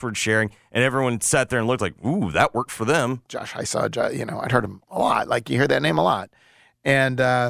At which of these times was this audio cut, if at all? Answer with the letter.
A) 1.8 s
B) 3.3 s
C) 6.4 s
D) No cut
B